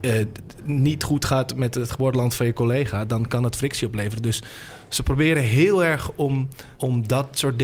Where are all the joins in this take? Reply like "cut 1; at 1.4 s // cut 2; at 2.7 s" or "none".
cut 1; at 6.7 s